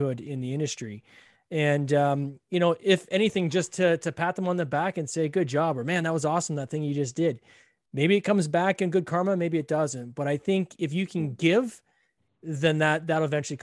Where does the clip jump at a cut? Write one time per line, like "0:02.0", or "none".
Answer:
none